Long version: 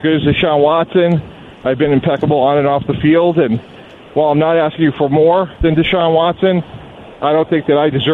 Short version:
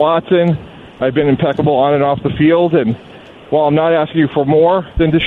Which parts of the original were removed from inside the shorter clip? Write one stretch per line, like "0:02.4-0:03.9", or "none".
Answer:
none